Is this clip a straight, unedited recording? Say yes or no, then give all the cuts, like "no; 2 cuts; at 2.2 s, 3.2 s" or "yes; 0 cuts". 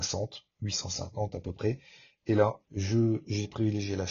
no; 1 cut; at 2.6 s